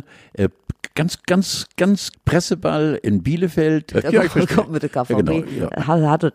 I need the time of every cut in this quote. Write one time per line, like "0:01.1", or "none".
0:02.1
0:03.9